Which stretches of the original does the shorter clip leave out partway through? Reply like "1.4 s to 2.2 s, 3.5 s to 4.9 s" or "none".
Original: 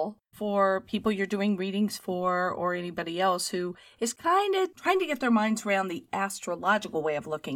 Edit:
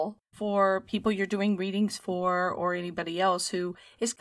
none